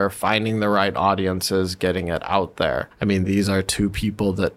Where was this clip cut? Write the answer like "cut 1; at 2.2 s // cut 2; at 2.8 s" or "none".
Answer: none